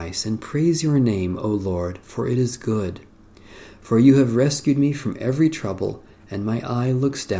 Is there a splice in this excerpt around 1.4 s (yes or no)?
no